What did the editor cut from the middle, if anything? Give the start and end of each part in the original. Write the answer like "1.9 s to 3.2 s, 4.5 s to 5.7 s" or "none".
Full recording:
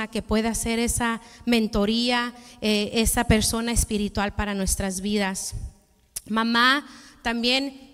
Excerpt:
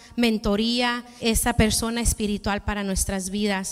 2.5 s to 2.9 s